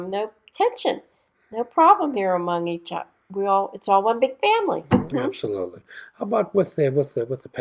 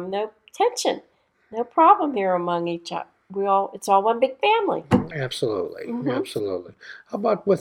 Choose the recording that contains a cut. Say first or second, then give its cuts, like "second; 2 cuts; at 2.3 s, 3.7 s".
first; 1 cut; at 5.1 s